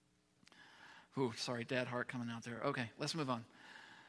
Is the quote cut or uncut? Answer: uncut